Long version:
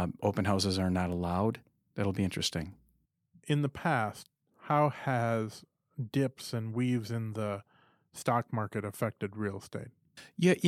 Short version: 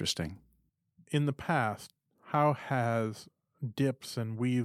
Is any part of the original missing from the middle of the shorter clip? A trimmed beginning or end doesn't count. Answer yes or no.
no